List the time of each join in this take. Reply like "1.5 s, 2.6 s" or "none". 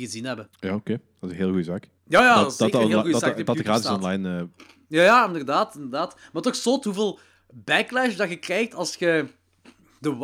2.0 s